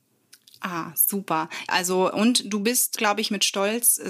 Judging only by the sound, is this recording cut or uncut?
cut